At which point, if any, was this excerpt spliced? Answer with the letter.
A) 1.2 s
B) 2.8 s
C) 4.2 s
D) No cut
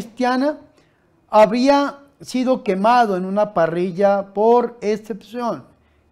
D